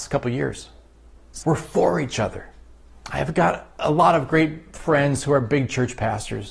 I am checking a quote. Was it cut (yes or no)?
yes